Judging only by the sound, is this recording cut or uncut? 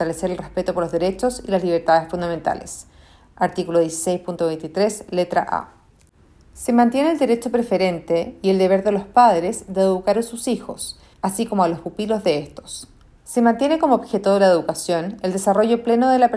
cut